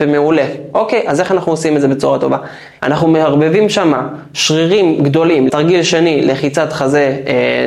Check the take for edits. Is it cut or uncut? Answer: cut